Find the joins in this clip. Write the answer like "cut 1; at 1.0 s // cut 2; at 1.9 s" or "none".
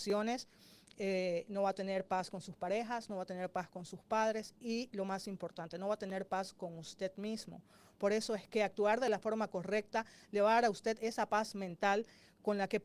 none